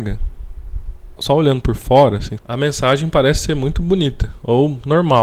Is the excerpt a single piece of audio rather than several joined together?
no; 2 cuts; at 1.2 s, 2.4 s

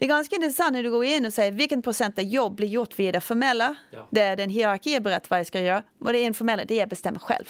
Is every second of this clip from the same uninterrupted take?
yes; 0 cuts

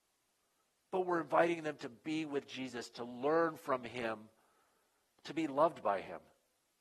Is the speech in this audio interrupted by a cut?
no; 0 cuts

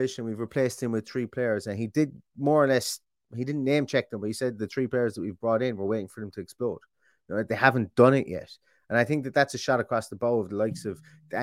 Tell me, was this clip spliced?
no; 0 cuts

